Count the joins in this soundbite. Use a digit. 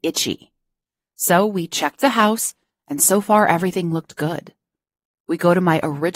0